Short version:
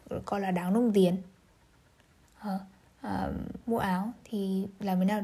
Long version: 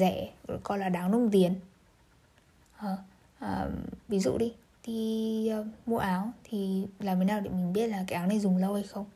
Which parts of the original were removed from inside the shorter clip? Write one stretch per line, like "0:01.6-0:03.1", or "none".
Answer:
0:04.0-0:05.8